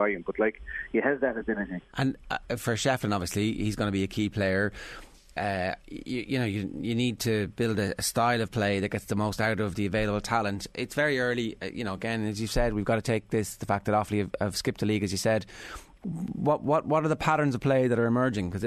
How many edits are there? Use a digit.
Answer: 1